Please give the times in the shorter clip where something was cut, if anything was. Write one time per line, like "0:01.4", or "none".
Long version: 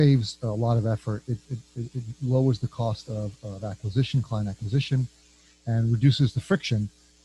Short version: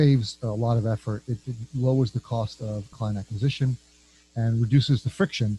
0:01.4
0:02.9